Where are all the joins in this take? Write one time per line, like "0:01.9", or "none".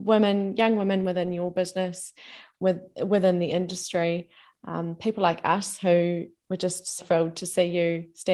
0:07.0